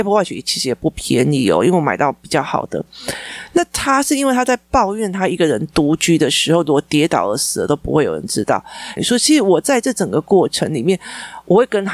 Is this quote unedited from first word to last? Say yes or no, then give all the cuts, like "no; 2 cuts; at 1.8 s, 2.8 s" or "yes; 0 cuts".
no; 1 cut; at 9.0 s